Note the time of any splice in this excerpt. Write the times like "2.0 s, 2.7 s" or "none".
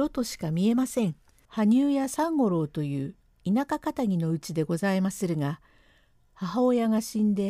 1.4 s